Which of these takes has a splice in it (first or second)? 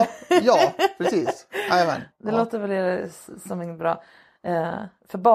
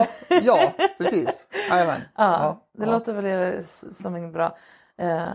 first